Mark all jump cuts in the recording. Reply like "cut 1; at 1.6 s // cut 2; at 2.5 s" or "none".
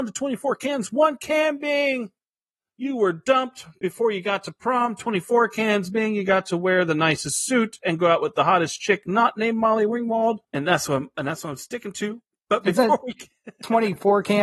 cut 1; at 10.4 s